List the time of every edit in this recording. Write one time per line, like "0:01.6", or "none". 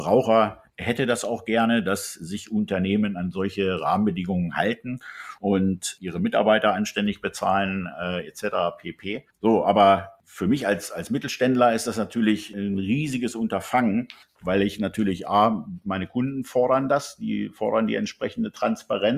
0:09.3